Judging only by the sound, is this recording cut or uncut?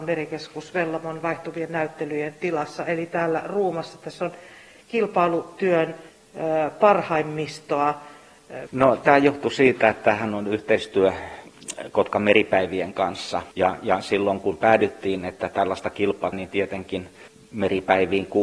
cut